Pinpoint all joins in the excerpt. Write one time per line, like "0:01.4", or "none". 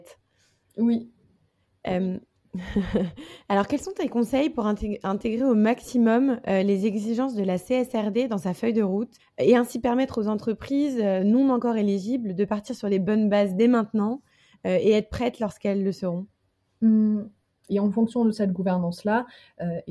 0:09.2
0:17.7